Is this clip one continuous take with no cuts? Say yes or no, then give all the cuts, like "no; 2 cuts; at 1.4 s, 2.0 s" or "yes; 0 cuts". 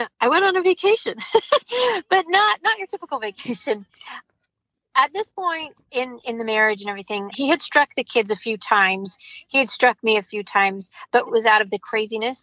no; 2 cuts; at 7.3 s, 11.3 s